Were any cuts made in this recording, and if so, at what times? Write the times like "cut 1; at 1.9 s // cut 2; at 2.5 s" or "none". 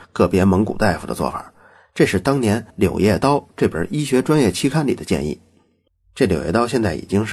none